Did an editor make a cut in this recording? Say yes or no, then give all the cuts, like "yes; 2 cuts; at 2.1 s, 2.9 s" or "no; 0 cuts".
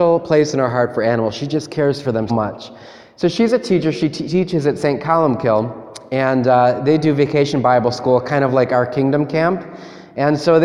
yes; 1 cut; at 2.3 s